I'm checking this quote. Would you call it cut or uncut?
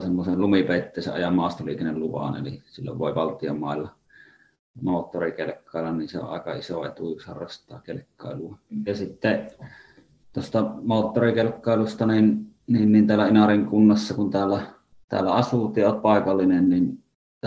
cut